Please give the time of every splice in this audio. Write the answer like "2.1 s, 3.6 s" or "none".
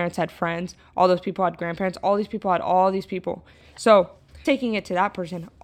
4.4 s